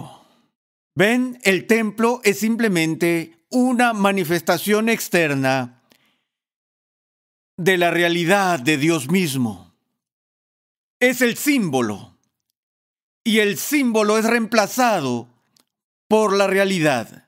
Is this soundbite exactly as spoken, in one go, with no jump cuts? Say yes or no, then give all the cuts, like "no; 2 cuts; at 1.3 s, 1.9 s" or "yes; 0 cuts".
yes; 0 cuts